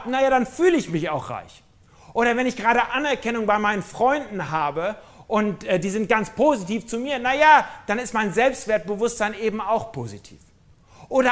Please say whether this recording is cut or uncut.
uncut